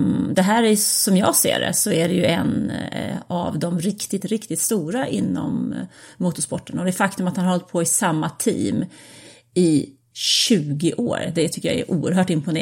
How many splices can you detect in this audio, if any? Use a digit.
1